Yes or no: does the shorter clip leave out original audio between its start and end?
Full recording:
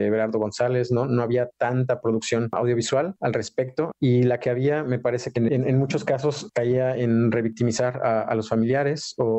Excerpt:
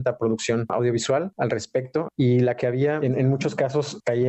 yes